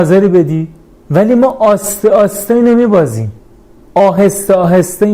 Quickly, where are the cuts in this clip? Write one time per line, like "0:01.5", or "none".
0:00.9